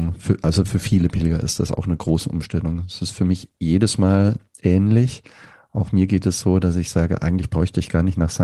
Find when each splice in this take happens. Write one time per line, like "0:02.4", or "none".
none